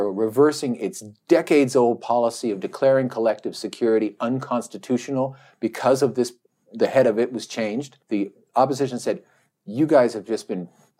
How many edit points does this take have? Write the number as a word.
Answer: one